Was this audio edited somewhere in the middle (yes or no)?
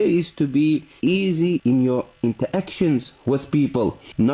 no